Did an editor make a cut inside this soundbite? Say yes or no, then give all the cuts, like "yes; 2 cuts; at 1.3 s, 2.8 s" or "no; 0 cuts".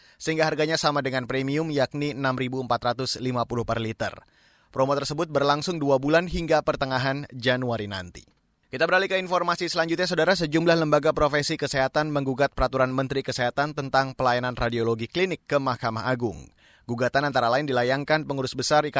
no; 0 cuts